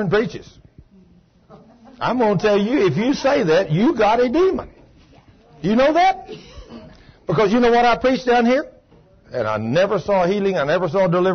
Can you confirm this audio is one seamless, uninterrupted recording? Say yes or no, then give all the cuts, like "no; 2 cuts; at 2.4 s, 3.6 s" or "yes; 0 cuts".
no; 1 cut; at 9.2 s